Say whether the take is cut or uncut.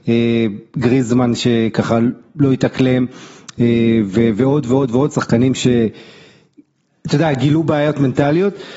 uncut